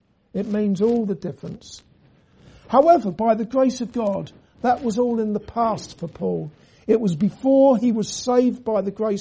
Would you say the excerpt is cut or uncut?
uncut